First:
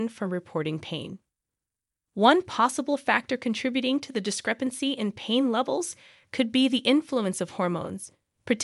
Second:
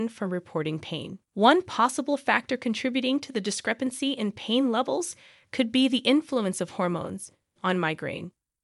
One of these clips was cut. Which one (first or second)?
second